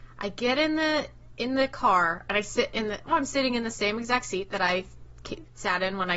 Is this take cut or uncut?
cut